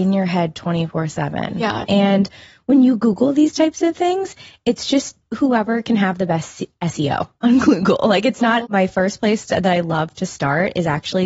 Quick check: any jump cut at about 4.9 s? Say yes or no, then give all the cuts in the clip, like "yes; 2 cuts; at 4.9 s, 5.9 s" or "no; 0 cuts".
no; 2 cuts; at 1.8 s, 8.6 s